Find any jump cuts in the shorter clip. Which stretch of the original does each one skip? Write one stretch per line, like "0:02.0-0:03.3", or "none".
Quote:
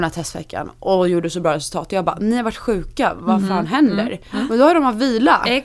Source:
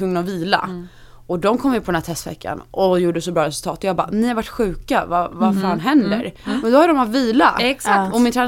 0:05.1-0:05.3